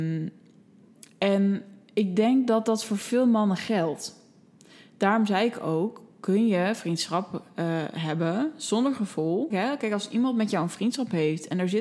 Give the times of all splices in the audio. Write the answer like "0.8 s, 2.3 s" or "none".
9.5 s